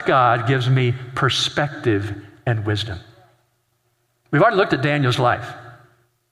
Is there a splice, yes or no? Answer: no